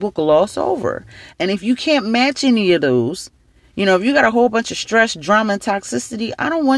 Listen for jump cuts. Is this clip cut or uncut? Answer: cut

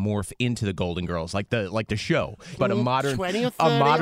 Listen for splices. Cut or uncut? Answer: cut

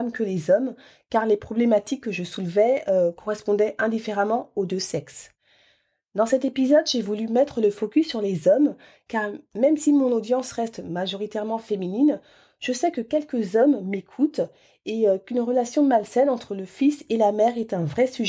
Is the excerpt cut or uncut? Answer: uncut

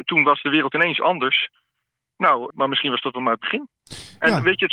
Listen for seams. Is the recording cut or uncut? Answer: cut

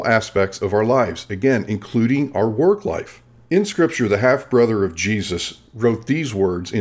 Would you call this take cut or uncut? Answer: cut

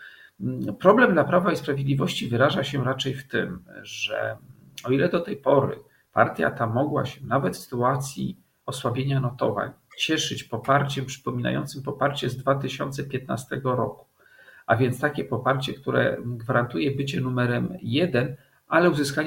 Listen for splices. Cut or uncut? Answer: uncut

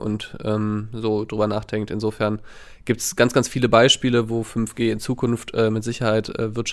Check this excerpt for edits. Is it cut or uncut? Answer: uncut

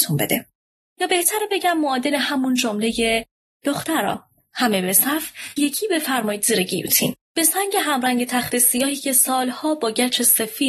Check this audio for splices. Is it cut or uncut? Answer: cut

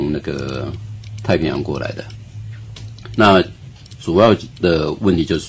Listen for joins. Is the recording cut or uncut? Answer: cut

